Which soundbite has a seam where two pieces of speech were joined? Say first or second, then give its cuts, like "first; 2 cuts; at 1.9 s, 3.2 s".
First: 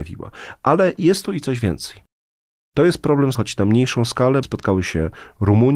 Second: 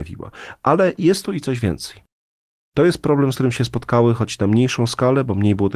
first; 2 cuts; at 3.4 s, 4.4 s